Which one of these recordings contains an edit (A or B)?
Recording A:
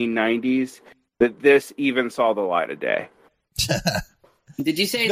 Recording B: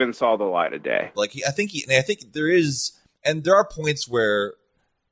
B